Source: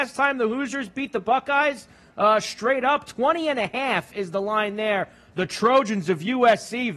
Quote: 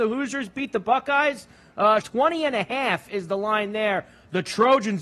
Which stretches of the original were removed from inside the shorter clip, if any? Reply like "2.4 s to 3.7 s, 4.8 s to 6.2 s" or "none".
2.4 s to 3.1 s